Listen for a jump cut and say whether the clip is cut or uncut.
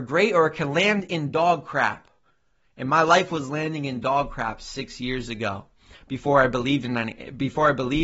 uncut